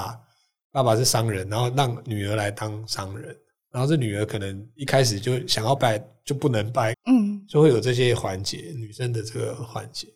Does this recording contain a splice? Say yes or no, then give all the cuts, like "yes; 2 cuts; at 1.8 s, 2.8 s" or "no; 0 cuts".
yes; 2 cuts; at 5.8 s, 6.9 s